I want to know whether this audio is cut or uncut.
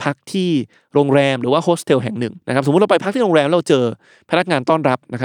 cut